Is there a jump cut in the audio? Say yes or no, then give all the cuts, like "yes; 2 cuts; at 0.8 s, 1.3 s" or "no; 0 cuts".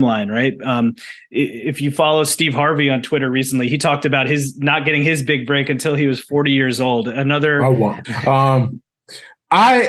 yes; 1 cut; at 8.0 s